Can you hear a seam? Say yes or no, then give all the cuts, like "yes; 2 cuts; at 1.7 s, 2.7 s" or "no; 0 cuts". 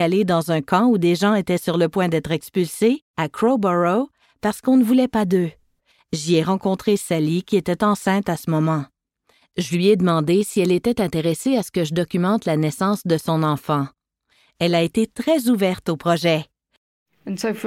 no; 0 cuts